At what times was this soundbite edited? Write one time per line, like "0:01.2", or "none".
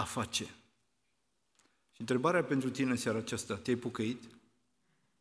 none